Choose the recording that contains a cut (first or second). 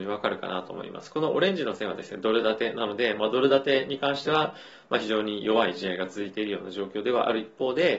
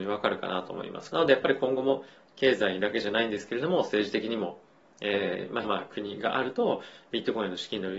second